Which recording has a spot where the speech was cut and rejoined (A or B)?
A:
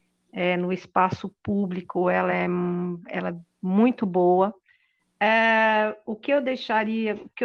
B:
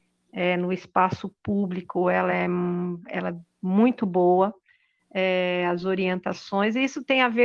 A